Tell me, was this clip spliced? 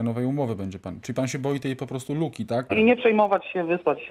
yes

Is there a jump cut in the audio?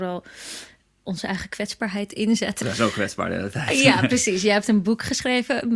no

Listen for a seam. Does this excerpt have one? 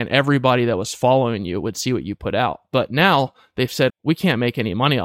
yes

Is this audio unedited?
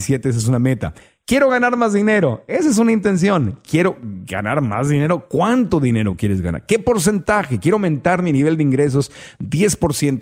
yes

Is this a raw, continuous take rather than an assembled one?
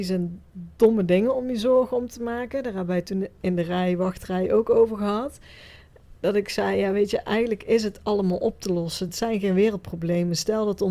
yes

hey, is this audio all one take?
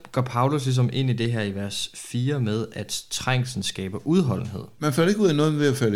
no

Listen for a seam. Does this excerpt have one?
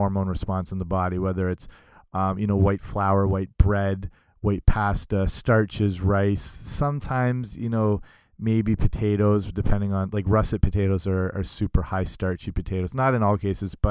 no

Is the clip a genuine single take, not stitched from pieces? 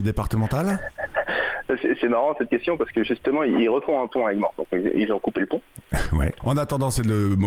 no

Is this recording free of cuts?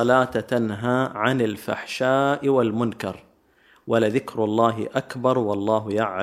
yes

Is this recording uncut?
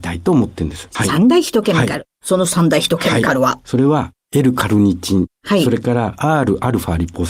yes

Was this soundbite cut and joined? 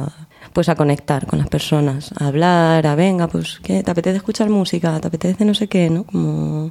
no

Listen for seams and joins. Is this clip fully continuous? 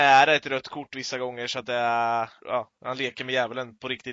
no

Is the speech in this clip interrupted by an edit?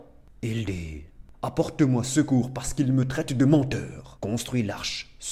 yes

